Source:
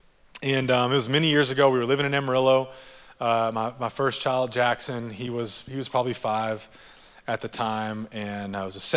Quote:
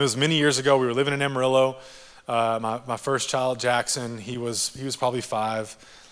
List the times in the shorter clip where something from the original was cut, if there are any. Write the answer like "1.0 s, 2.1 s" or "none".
none